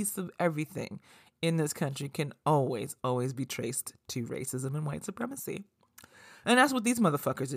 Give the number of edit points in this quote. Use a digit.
2